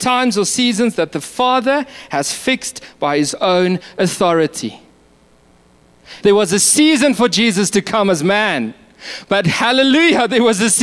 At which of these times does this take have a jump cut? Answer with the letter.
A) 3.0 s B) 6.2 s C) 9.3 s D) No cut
B